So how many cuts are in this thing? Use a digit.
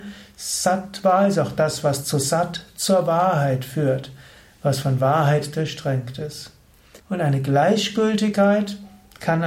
1